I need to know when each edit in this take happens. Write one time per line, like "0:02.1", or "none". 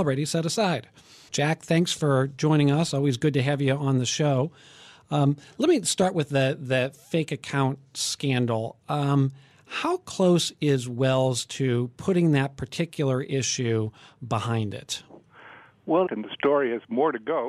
0:01.3
0:16.1